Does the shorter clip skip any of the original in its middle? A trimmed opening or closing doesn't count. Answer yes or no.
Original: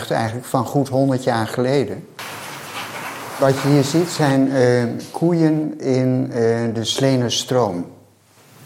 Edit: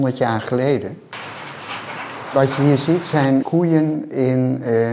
yes